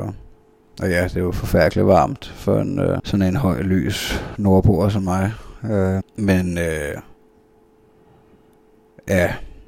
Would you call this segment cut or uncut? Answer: cut